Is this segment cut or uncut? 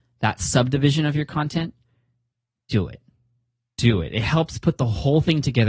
uncut